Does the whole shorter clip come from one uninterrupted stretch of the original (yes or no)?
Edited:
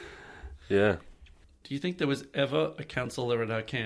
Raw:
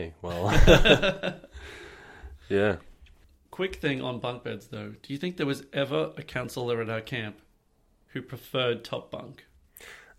no